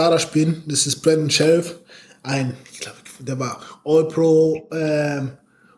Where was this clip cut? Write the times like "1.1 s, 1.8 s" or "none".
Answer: none

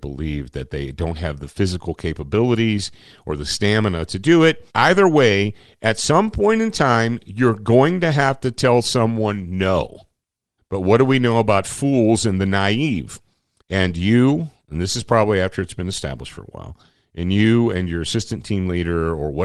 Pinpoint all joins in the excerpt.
4.7 s, 10.6 s, 13.6 s

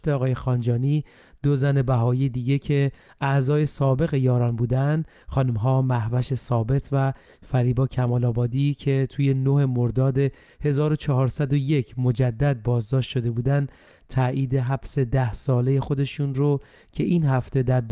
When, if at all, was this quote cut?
none

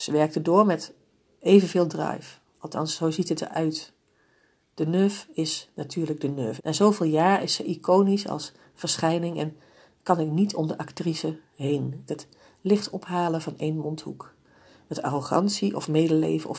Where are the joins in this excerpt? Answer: 6.6 s, 12.1 s

